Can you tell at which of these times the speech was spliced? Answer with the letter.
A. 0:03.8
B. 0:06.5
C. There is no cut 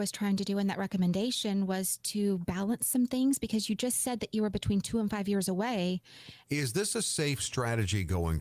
B